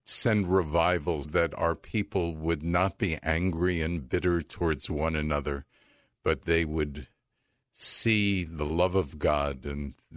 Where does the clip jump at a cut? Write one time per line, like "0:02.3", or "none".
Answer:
0:01.2